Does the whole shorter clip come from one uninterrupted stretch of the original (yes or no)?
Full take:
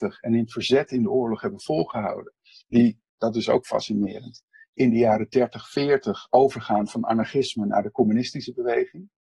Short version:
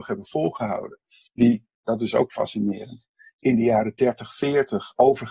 yes